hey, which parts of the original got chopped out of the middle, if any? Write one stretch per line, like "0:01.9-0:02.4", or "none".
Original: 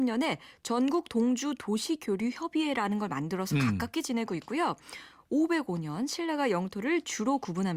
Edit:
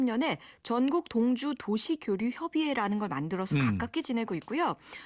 none